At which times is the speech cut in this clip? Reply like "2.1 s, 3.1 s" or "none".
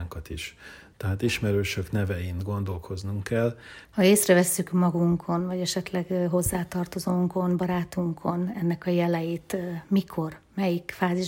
0.9 s, 3.8 s